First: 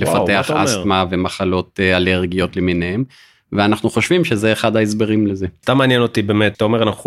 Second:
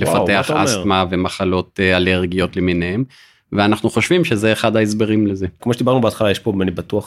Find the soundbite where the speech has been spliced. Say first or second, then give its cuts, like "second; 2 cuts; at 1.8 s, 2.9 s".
second; 1 cut; at 5.6 s